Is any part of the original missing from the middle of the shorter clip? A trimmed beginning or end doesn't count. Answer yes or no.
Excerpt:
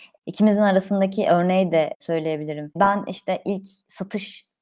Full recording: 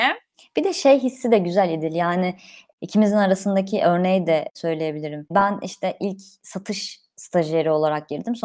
no